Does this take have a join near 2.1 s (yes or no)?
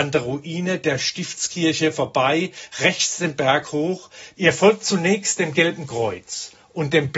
no